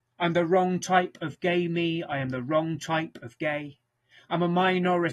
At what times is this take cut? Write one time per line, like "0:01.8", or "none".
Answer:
none